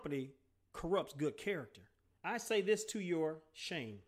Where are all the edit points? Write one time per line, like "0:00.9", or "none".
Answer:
0:02.2

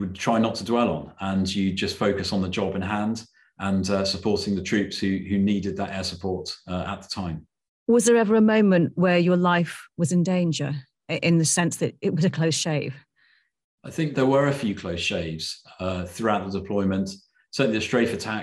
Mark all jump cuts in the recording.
0:14.1

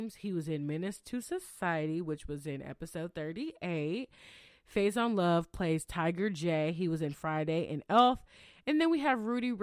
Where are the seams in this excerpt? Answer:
0:04.5

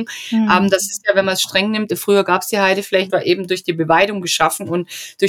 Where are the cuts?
0:01.9
0:03.1

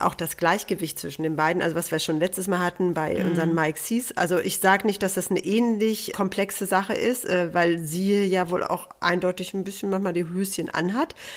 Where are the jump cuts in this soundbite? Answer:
0:06.1

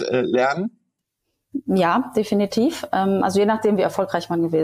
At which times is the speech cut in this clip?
none

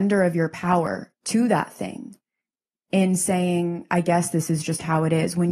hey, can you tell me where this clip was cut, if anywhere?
none

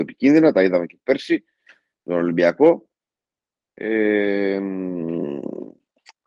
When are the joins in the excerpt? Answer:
none

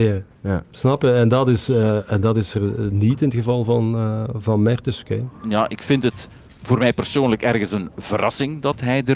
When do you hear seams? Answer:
none

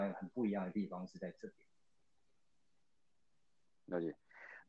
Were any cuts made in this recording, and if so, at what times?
none

